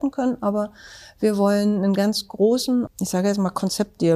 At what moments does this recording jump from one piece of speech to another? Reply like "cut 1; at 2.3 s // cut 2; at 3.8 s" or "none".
cut 1; at 2.9 s